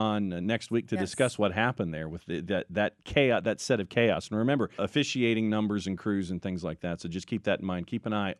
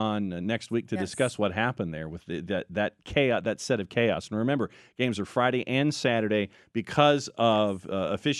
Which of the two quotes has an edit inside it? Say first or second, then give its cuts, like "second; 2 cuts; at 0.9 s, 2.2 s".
first; 1 cut; at 4.8 s